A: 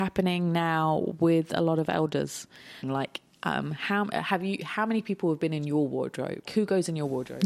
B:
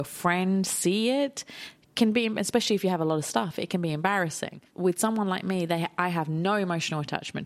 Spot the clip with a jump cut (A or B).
A